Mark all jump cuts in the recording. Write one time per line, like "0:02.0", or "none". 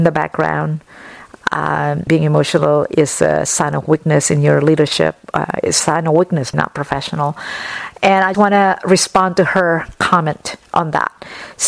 0:02.1
0:06.5
0:08.3